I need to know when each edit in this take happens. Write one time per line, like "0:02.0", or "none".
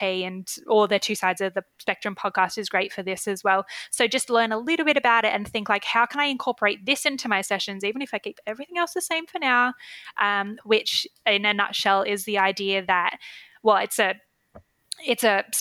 0:10.6